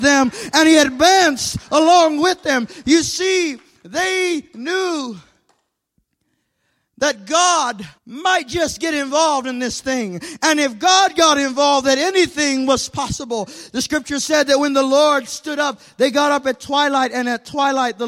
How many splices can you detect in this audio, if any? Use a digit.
1